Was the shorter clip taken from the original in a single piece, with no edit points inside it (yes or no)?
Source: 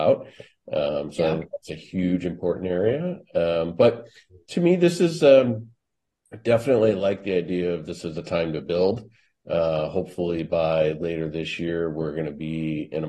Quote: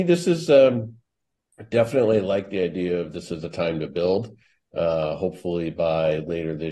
yes